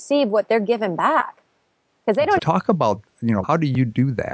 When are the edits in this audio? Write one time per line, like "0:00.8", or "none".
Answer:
0:02.4
0:03.4